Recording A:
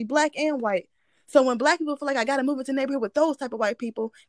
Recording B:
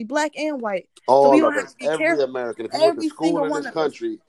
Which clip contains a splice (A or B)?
B